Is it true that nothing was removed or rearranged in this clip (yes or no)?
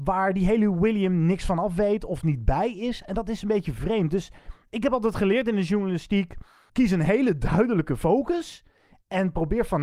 yes